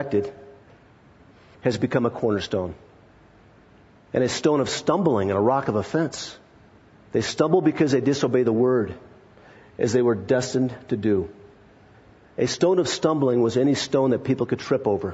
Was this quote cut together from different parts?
no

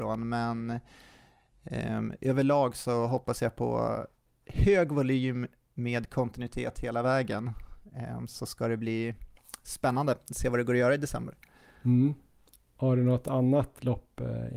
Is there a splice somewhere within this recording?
no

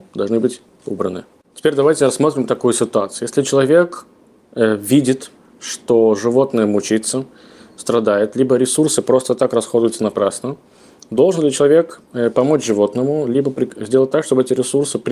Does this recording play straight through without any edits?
yes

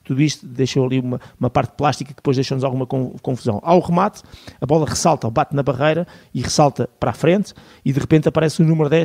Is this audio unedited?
yes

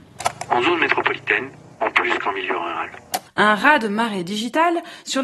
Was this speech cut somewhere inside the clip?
yes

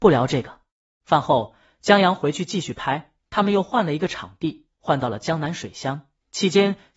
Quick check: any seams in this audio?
yes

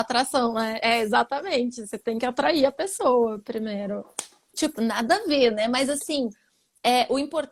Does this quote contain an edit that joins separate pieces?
yes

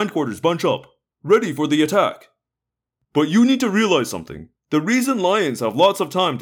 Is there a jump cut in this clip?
yes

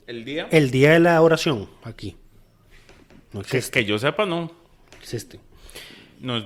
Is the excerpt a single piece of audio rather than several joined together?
yes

